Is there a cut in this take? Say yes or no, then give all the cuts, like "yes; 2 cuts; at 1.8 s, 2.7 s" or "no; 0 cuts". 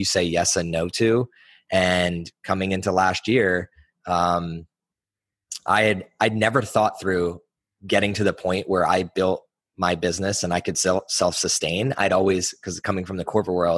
no; 0 cuts